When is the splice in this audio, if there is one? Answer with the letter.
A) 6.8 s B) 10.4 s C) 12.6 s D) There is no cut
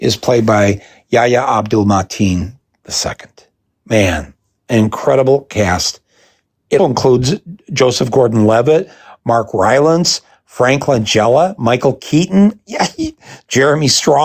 A